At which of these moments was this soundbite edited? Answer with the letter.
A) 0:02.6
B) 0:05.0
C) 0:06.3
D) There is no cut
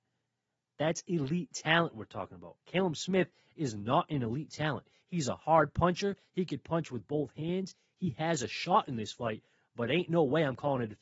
B